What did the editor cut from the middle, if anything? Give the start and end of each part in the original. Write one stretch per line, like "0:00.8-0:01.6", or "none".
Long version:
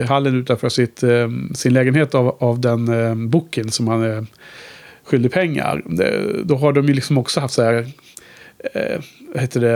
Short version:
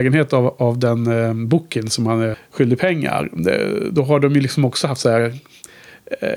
0:04.2-0:04.9